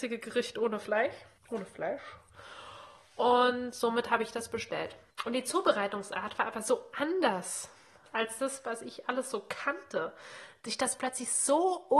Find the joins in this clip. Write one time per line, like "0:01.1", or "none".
none